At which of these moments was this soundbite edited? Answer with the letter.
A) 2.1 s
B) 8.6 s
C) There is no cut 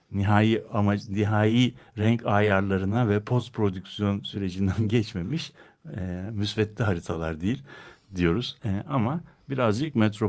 B